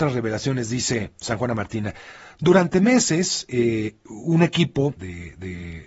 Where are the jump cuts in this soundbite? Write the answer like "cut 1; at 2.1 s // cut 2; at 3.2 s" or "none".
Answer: cut 1; at 5.0 s